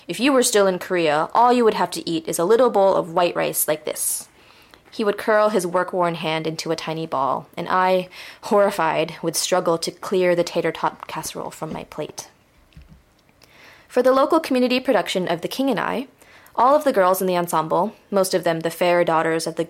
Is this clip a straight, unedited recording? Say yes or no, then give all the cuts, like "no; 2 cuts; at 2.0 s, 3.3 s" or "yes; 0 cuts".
yes; 0 cuts